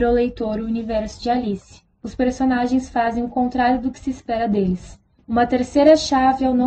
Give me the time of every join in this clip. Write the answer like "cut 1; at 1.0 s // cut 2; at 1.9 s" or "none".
cut 1; at 5.1 s